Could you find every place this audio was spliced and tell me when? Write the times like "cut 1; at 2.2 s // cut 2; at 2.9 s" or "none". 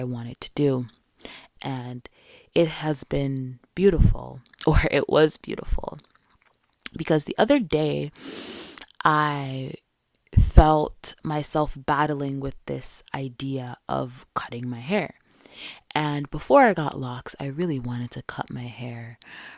cut 1; at 1.6 s

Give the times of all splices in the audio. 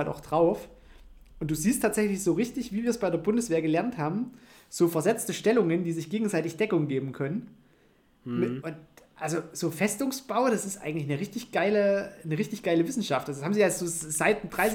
cut 1; at 8.6 s

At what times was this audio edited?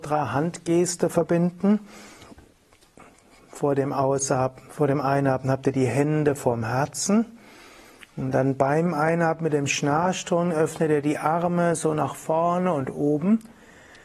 none

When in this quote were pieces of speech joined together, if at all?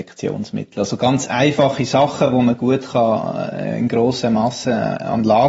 none

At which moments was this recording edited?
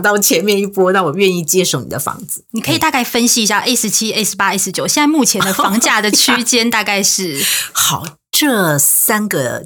cut 1; at 2.5 s

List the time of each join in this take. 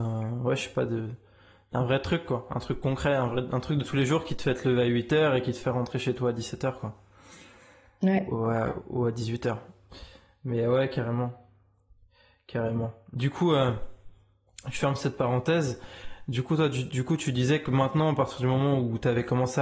none

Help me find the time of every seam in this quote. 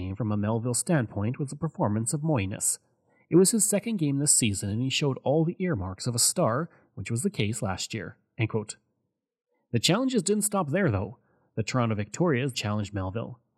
cut 1; at 12.5 s

